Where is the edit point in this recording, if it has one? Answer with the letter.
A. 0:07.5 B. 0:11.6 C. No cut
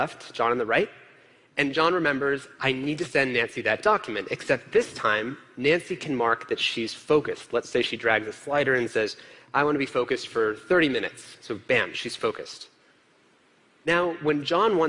C